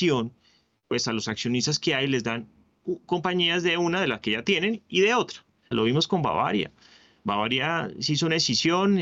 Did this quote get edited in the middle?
yes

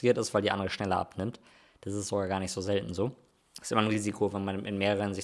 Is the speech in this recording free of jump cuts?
yes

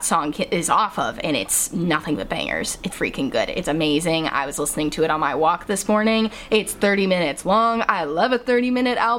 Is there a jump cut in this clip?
yes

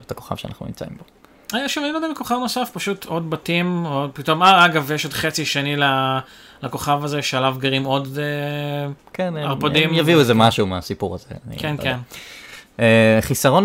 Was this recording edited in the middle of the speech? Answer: no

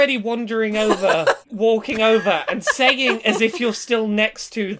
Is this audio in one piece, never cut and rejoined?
no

